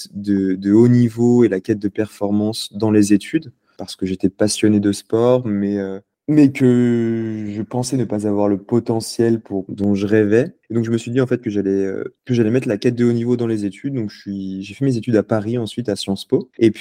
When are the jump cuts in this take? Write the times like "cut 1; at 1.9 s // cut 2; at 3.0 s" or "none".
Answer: cut 1; at 9.7 s